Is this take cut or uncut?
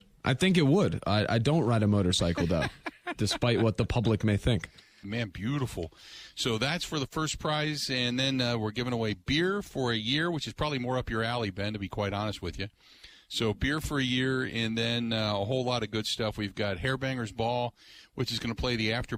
cut